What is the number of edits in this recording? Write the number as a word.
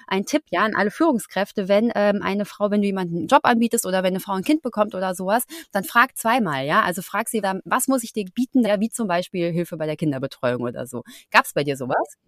two